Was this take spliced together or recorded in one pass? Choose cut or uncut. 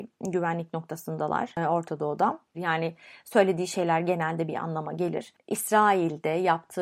cut